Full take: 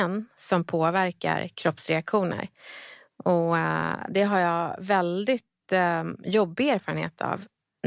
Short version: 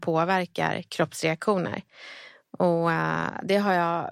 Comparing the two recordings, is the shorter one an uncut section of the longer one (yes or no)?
yes